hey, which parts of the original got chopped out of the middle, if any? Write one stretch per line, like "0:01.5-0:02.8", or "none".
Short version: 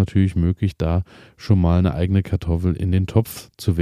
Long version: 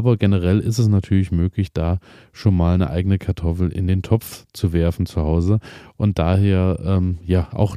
none